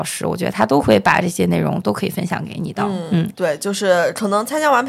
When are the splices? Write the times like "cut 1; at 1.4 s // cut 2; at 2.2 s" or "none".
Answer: cut 1; at 3.3 s